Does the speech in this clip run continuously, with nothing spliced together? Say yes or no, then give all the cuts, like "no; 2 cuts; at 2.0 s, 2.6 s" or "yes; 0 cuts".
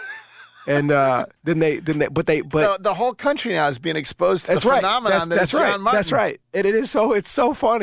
no; 1 cut; at 1.4 s